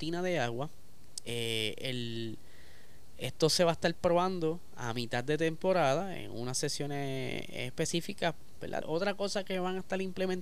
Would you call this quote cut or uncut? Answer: cut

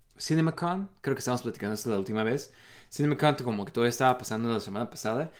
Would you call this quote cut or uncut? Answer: uncut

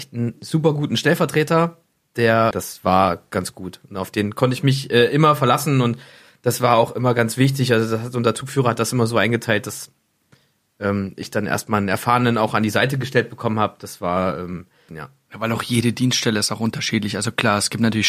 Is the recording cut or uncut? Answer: cut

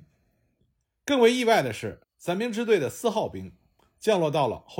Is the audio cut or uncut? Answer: uncut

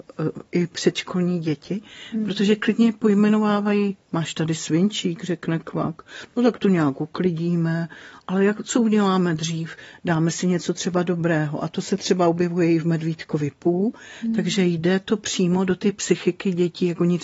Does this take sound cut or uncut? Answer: uncut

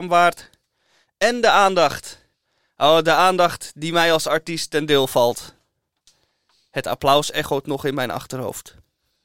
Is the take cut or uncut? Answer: uncut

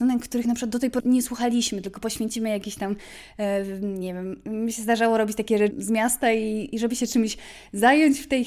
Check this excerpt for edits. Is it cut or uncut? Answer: cut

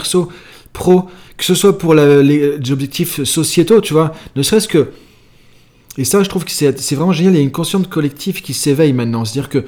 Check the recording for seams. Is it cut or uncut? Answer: uncut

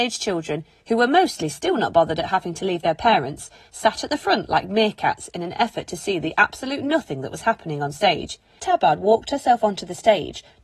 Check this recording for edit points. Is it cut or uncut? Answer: cut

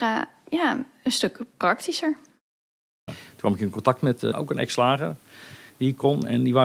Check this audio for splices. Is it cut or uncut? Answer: cut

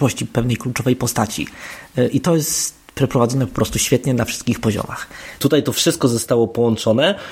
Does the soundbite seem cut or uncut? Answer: cut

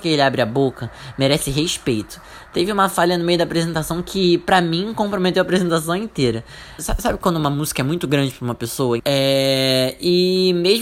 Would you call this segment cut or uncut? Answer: cut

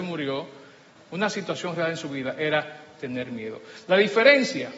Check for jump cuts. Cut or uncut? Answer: cut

